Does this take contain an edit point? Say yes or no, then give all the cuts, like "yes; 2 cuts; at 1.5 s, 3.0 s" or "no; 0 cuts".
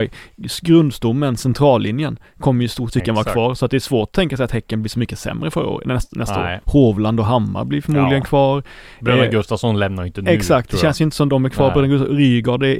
yes; 3 cuts; at 2.9 s, 6.6 s, 11.3 s